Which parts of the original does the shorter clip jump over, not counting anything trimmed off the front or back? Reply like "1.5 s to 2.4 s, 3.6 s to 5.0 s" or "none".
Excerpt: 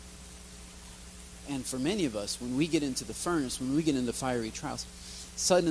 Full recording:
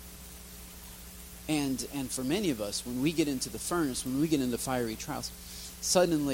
1.4 s to 1.9 s